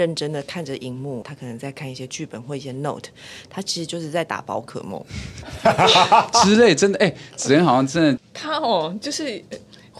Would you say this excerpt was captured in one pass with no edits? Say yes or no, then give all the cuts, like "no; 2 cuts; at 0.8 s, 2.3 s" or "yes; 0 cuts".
no; 2 cuts; at 1.2 s, 8.2 s